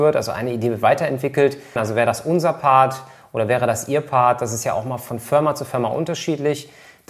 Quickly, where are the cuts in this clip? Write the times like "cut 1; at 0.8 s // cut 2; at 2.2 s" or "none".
cut 1; at 1.8 s

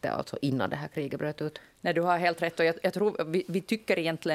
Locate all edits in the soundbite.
none

